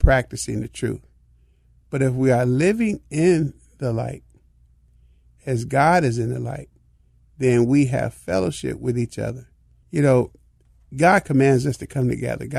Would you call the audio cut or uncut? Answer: cut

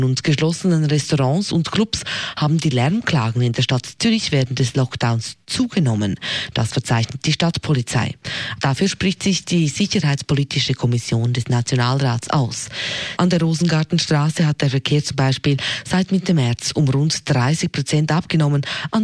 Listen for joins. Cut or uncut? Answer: cut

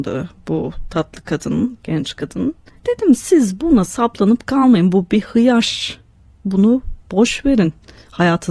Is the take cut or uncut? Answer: uncut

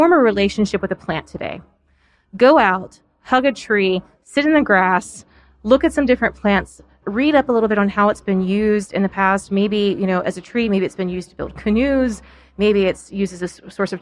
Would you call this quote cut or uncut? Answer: cut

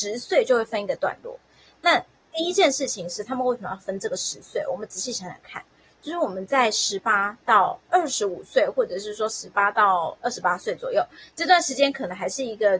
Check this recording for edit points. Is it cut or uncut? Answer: uncut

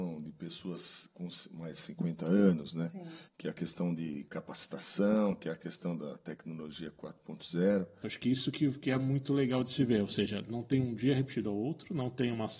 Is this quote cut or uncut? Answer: cut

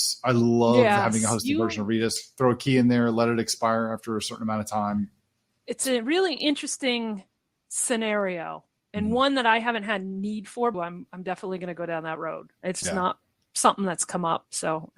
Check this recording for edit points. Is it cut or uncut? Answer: cut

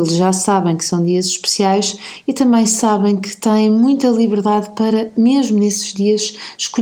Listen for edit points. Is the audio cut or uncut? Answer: uncut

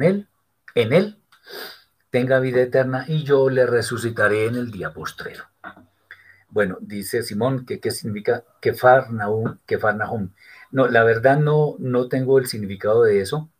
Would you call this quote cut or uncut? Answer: uncut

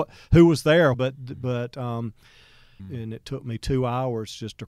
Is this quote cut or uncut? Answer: cut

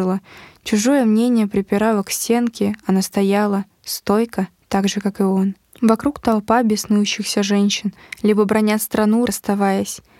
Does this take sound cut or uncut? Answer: cut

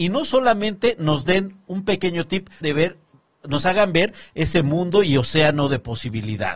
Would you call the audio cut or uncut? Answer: cut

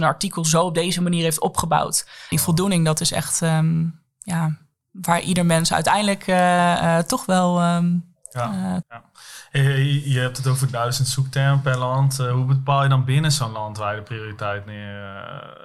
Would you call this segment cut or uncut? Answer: cut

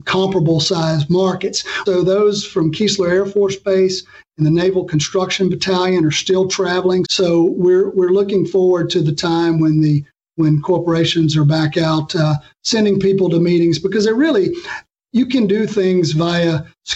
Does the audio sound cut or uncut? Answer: cut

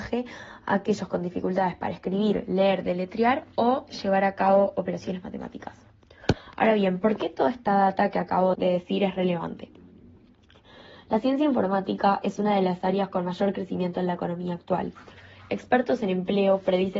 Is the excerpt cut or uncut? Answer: cut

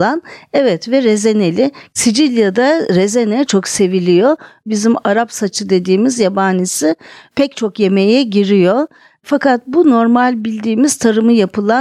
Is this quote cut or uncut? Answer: cut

